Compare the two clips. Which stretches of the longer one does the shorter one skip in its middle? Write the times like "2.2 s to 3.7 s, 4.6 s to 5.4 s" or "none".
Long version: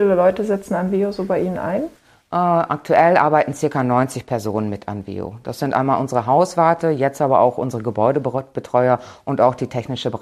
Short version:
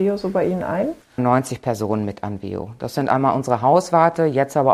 2.1 s to 3.8 s

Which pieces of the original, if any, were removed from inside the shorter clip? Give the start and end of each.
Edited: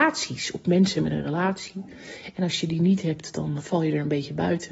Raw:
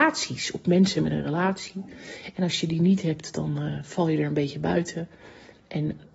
3.6 s to 3.8 s

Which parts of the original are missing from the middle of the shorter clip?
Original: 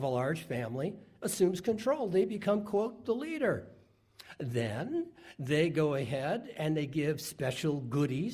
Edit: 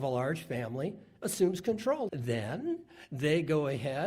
2.1 s to 4.4 s

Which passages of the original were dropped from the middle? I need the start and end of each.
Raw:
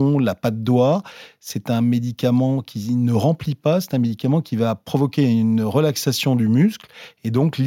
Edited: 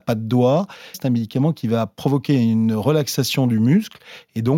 1.3 s to 3.8 s

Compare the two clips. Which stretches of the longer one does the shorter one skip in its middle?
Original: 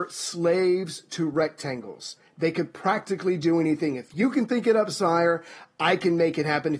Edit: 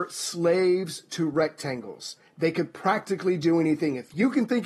none

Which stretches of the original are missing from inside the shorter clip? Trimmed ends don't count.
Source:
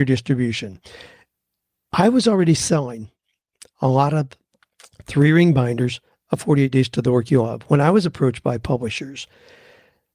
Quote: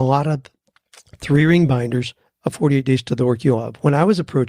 none

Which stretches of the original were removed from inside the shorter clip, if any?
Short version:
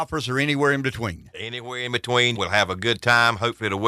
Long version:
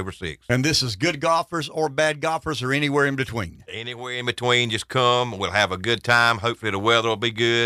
4.7 s to 5.4 s

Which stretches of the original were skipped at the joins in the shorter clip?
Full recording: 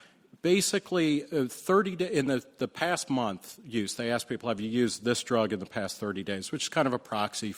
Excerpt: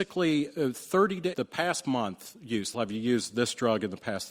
2.1 s to 2.6 s, 4.0 s to 4.4 s

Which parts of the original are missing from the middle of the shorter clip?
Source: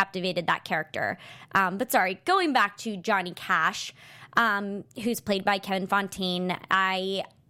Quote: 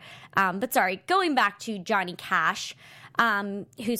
none

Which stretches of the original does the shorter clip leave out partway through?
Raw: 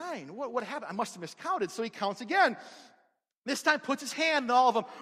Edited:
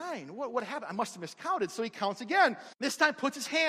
2.7 s to 3.4 s

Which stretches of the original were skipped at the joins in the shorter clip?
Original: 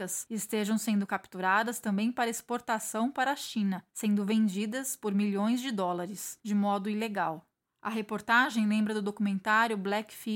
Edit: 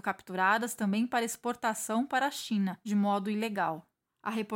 3.9 s to 6.4 s

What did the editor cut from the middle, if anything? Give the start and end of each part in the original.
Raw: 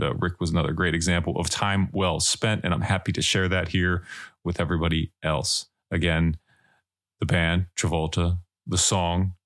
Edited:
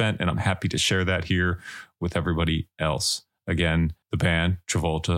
6.5 s to 7.1 s

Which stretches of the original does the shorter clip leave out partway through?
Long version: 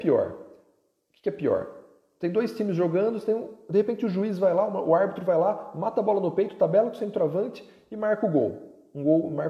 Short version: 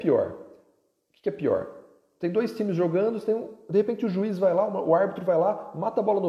none

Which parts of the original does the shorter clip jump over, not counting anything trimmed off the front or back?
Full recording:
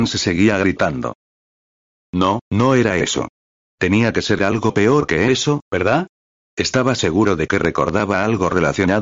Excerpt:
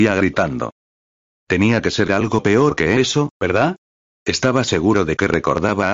1.7 s to 3.6 s

